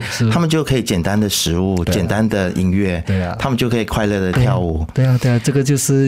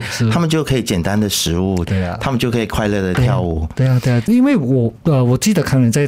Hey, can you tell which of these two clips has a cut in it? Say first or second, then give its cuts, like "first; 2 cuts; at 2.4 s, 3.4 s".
second; 2 cuts; at 1.9 s, 4.2 s